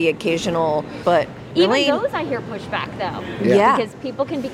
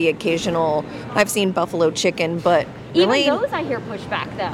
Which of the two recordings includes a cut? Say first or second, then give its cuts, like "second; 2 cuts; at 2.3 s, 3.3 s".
first; 1 cut; at 1.0 s